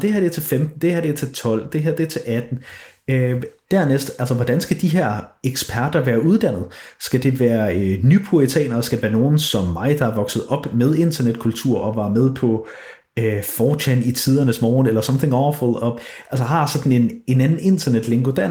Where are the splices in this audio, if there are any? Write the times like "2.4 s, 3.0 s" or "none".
none